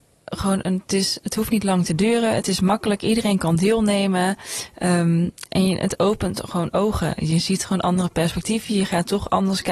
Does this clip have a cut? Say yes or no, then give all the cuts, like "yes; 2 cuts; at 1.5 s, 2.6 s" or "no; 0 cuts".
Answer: no; 0 cuts